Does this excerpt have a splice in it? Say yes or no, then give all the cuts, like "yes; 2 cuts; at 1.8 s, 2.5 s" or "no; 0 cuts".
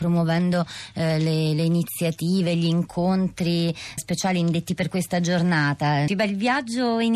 yes; 2 cuts; at 4.0 s, 6.1 s